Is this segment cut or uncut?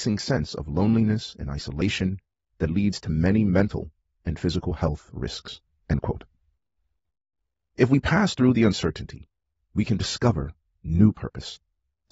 uncut